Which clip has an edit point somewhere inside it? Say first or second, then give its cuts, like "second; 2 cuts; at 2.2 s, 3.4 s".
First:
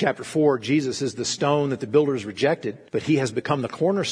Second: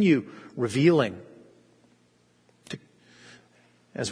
first; 1 cut; at 2.9 s